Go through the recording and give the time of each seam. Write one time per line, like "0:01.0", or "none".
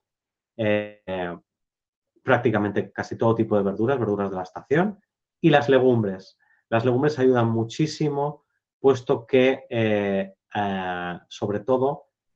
none